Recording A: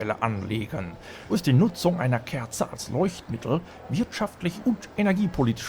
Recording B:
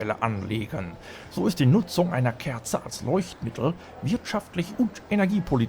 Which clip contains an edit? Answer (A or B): A